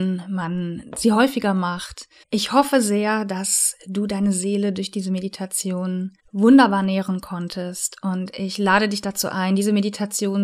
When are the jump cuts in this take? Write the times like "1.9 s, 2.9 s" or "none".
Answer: 2.2 s, 6.2 s

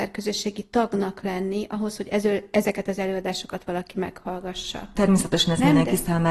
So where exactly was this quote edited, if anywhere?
4.9 s

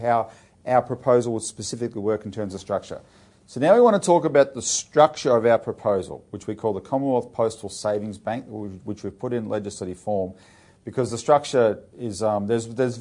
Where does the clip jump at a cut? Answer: 3.3 s, 11.9 s

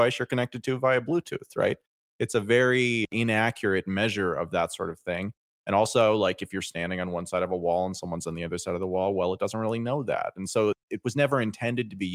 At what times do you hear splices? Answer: none

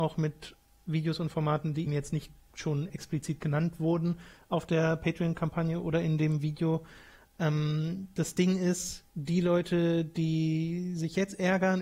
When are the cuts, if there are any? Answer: 1.9 s, 9.1 s

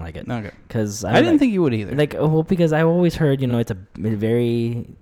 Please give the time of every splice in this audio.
none

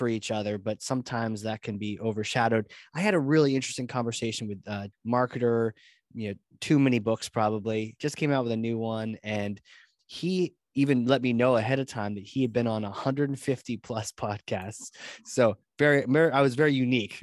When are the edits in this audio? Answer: 4.9 s

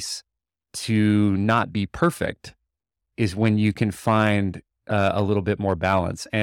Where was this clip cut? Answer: none

